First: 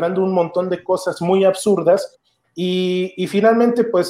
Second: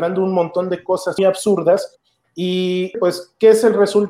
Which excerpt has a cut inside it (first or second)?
second